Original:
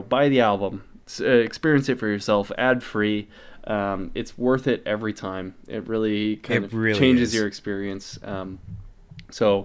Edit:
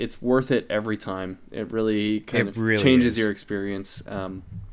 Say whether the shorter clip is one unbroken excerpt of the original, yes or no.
yes